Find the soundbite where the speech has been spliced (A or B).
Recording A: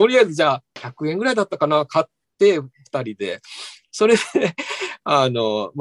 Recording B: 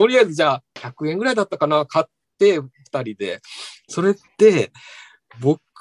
B